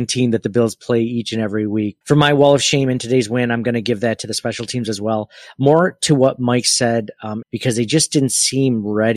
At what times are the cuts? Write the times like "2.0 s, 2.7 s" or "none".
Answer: 2.0 s, 7.4 s